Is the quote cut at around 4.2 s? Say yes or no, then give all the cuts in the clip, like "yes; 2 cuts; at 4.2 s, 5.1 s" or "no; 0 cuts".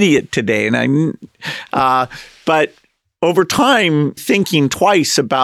yes; 1 cut; at 4.2 s